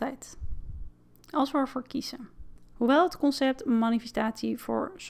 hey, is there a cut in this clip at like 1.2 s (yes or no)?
yes